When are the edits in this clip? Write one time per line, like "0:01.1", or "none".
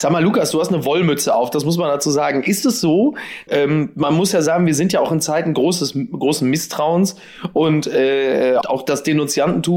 0:03.5
0:08.6